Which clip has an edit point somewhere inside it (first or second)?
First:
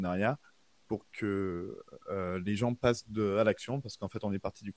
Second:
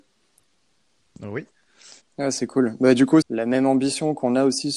second